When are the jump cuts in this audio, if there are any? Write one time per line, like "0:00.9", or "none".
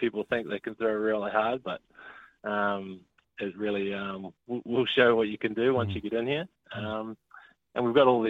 none